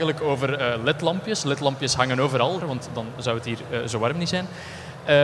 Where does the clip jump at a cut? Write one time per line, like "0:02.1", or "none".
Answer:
0:02.6